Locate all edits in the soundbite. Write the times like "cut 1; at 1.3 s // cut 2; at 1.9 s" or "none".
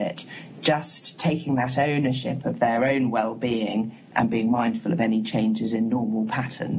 none